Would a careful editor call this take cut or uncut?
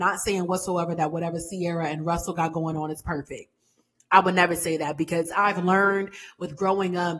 uncut